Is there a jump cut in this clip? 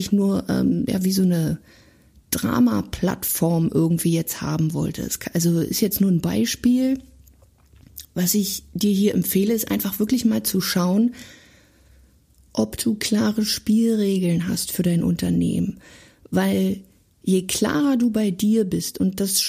no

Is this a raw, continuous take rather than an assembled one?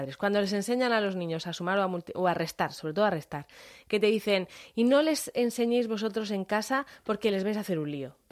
yes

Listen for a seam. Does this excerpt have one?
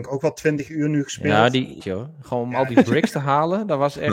yes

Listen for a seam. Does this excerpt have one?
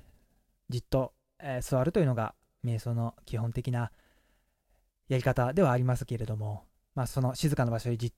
no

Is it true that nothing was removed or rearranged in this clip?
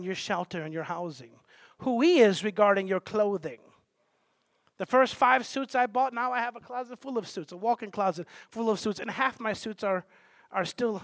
yes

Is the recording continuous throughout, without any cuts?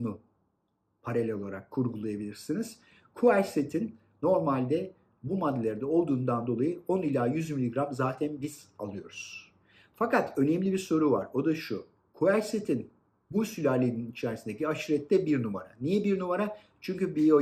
yes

